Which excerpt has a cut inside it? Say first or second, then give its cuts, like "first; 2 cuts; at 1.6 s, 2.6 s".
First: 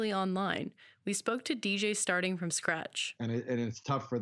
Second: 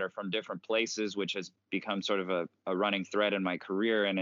first; 1 cut; at 3.2 s